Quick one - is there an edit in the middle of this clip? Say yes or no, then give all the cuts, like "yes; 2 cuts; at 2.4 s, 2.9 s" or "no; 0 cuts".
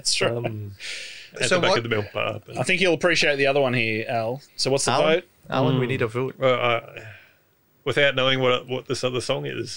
yes; 2 cuts; at 1.4 s, 4.5 s